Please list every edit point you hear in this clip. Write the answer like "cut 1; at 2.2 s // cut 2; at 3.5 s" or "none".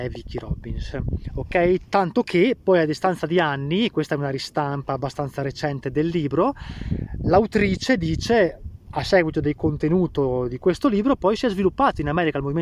cut 1; at 1.9 s